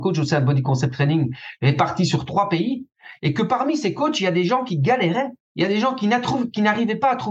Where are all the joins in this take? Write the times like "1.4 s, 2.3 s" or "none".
none